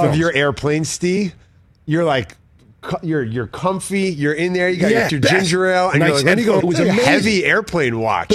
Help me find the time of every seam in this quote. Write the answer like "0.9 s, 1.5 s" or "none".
5.1 s, 6.6 s